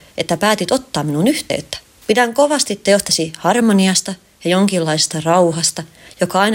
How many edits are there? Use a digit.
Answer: 1